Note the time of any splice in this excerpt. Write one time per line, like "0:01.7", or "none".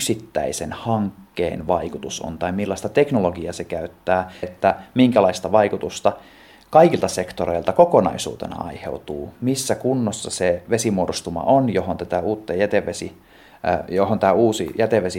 0:04.4